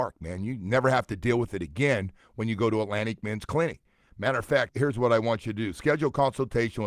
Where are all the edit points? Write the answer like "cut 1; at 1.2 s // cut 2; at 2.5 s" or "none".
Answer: cut 1; at 4.7 s